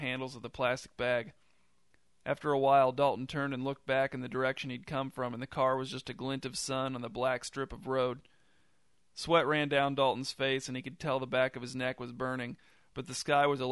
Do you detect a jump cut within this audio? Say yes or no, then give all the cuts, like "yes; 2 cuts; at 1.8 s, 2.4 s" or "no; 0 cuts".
no; 0 cuts